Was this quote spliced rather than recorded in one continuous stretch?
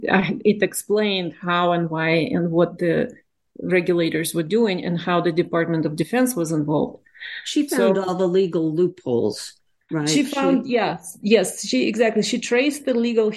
no; 0 cuts

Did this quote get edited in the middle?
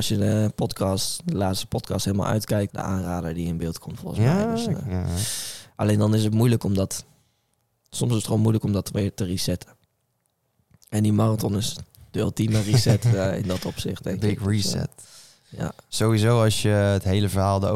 yes; 2 cuts; at 2.7 s, 5.7 s

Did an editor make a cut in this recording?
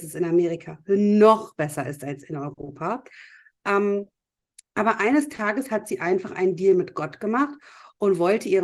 no; 0 cuts

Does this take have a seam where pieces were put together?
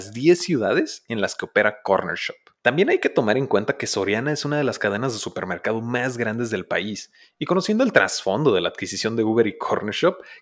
no; 0 cuts

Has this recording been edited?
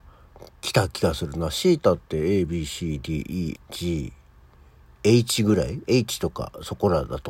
yes; 1 cut; at 3.5 s

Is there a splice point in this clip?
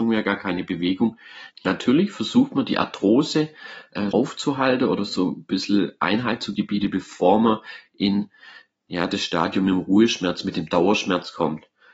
yes; 2 cuts; at 1.5 s, 4.1 s

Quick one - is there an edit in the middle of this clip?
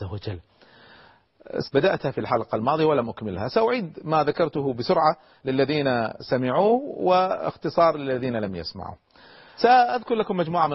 yes; 2 cuts; at 1.6 s, 9.6 s

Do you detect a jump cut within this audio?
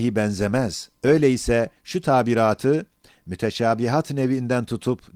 yes; 1 cut; at 1.0 s

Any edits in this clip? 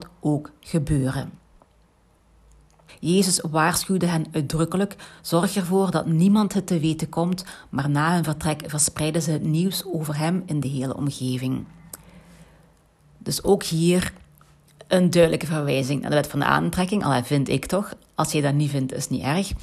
yes; 1 cut; at 2.9 s

